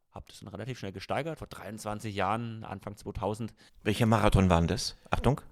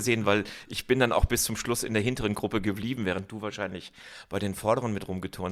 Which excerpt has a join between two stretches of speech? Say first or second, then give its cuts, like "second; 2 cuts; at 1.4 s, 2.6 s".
first; 2 cuts; at 1.4 s, 3.7 s